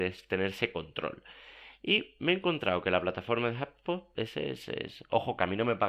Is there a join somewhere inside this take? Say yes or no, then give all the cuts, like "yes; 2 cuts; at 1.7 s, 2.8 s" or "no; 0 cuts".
yes; 1 cut; at 4.1 s